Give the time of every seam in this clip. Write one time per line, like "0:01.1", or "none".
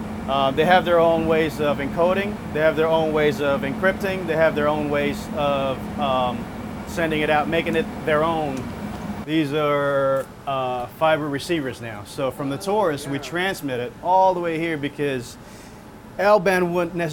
0:09.2